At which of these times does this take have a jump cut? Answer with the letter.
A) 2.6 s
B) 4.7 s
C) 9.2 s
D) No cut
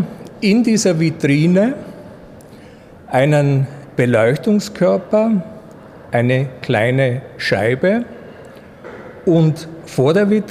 D